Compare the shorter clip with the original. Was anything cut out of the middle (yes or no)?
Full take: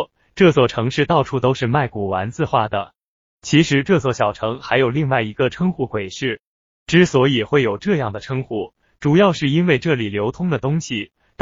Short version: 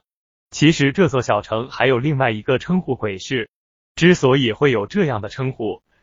no